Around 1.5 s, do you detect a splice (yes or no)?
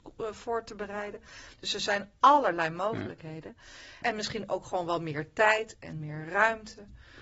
no